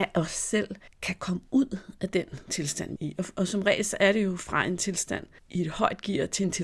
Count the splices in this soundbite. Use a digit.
1